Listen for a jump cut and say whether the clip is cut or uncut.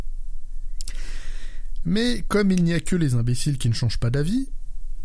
uncut